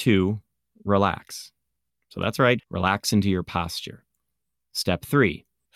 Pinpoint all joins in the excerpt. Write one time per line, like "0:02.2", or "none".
0:02.6